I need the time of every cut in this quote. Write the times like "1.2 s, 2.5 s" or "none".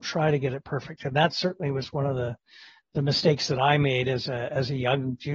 none